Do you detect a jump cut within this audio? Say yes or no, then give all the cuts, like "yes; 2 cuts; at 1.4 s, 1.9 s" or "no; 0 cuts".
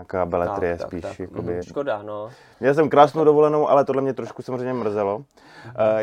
yes; 2 cuts; at 1.6 s, 4.1 s